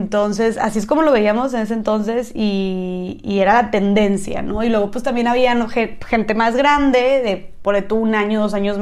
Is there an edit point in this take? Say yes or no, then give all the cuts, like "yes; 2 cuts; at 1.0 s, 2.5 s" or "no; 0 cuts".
no; 0 cuts